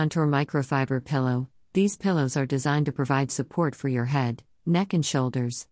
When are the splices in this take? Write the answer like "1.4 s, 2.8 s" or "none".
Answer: none